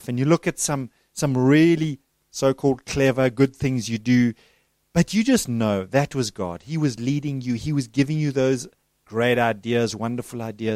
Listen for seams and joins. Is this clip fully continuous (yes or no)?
yes